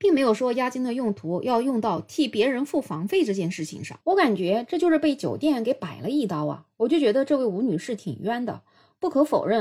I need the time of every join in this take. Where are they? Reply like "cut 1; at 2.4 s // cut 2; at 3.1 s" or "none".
cut 1; at 4.0 s